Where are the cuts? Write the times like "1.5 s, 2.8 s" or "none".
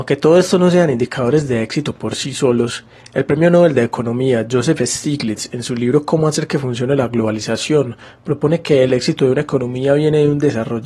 none